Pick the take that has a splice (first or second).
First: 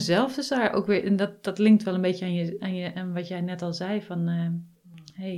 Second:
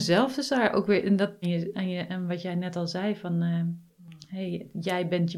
second